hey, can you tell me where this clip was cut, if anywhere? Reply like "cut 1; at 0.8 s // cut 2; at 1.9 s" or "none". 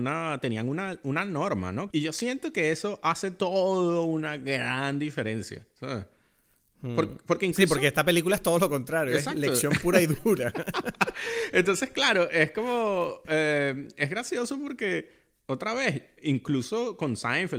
cut 1; at 1.9 s

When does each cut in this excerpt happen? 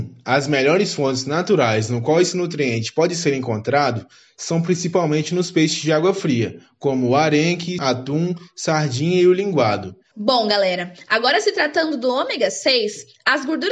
cut 1; at 7.8 s // cut 2; at 10.1 s

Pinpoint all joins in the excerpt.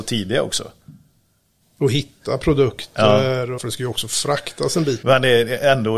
cut 1; at 3.6 s // cut 2; at 5.0 s

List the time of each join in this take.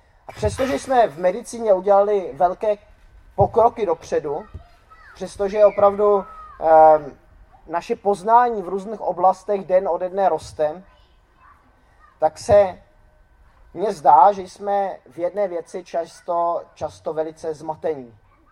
none

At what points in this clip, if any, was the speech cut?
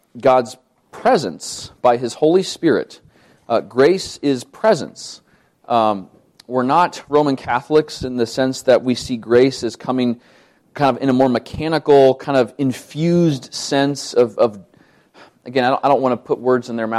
none

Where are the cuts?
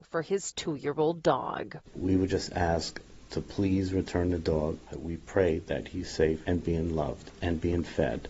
cut 1; at 4.9 s

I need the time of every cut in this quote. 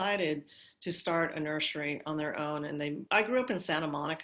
cut 1; at 3.1 s

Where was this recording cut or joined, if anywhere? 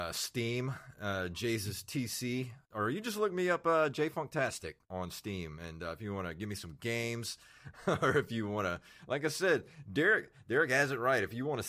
none

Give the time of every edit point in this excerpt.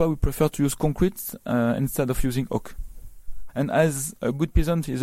cut 1; at 3.5 s

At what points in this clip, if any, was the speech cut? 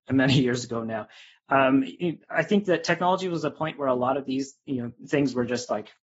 none

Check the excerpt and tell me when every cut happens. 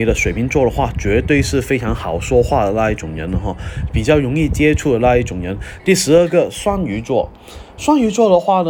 cut 1; at 5.8 s

